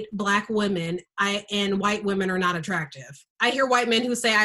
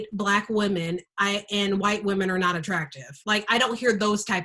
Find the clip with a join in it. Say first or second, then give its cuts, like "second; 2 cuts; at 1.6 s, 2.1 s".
first; 1 cut; at 3.2 s